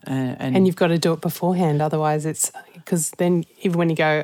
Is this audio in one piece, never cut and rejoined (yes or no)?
yes